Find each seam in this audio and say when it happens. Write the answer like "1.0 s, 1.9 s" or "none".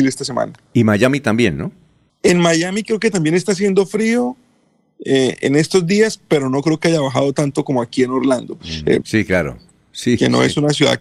2.1 s, 9.0 s